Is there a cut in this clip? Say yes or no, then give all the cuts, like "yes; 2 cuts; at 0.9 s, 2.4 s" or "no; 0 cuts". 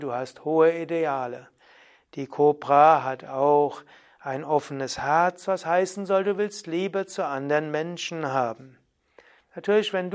no; 0 cuts